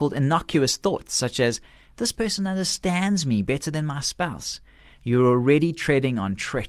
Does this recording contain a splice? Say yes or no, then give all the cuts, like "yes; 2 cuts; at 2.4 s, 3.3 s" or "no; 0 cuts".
no; 0 cuts